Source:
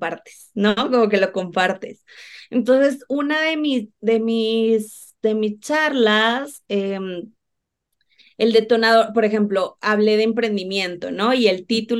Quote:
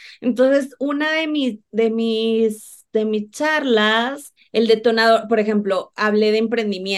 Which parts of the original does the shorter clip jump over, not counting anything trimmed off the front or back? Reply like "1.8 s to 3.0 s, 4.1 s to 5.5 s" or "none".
6.7 s to 8.2 s